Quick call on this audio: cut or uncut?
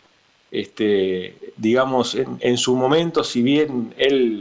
uncut